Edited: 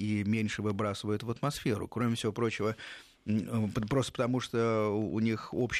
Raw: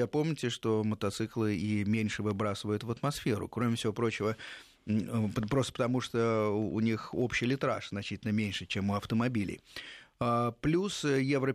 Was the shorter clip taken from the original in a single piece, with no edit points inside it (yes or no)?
yes